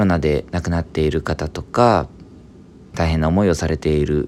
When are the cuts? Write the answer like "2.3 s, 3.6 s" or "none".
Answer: 2.9 s